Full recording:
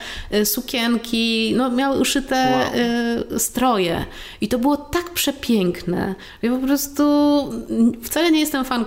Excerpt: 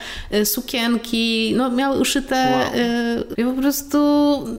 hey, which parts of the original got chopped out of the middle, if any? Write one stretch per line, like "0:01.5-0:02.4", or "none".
0:03.3-0:06.4

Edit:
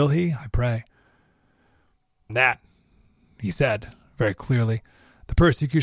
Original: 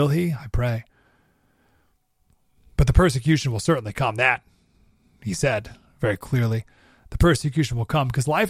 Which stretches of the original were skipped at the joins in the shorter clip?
0:02.3-0:04.1

